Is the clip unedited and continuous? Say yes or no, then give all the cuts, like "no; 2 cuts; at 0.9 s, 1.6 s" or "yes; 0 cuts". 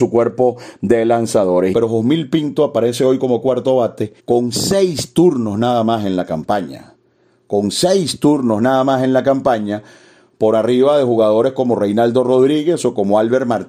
no; 2 cuts; at 1.7 s, 4.2 s